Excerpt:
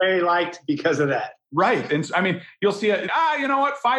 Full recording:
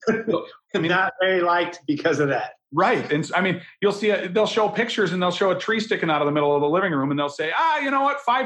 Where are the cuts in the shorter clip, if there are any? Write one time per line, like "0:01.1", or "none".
0:03.1